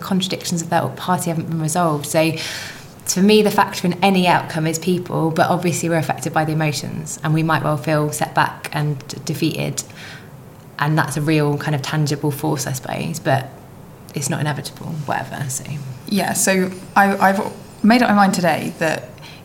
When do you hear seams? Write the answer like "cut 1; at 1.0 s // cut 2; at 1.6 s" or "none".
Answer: none